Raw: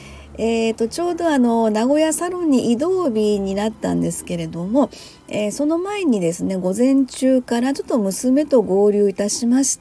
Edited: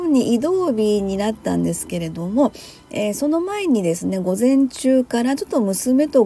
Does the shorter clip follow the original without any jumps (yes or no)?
yes